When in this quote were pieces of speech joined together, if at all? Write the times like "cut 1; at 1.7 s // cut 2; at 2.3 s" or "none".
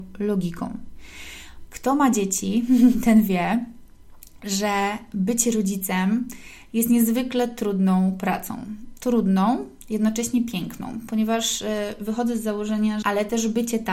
cut 1; at 1.7 s // cut 2; at 13.0 s